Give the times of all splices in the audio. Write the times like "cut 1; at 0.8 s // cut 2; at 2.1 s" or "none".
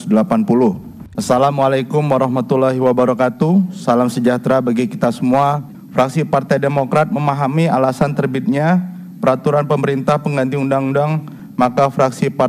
cut 1; at 1.2 s